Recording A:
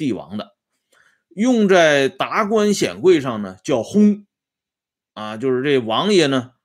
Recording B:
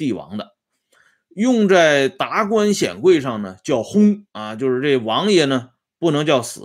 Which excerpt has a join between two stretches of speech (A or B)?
B